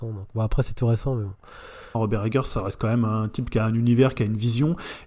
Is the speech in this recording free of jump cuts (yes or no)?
no